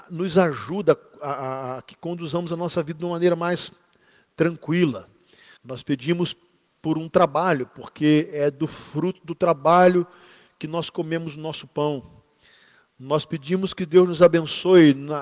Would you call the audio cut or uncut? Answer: cut